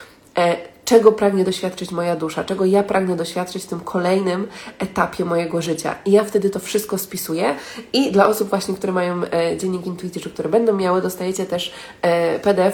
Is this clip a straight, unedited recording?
yes; 0 cuts

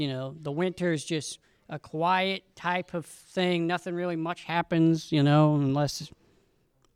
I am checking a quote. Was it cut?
no; 0 cuts

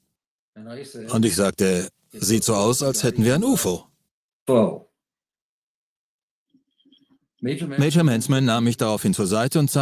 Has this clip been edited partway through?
no; 0 cuts

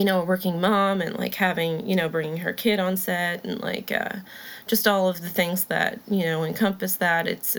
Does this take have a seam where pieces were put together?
no; 0 cuts

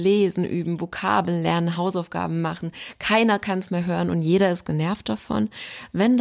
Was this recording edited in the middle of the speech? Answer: no; 0 cuts

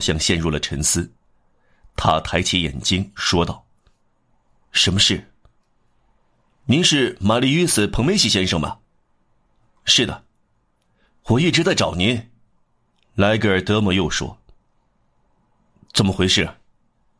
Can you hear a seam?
no; 0 cuts

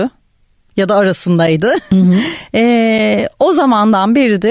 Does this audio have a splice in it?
no; 0 cuts

